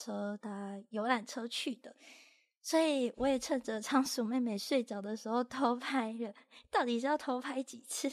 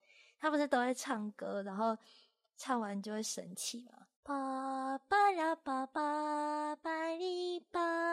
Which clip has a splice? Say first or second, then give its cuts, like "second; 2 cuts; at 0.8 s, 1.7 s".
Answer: second; 1 cut; at 4.1 s